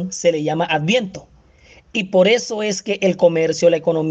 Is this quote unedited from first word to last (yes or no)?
yes